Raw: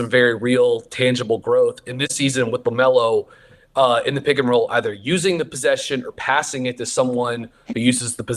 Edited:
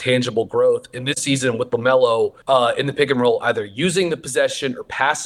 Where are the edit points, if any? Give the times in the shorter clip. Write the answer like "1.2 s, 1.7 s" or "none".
2.4 s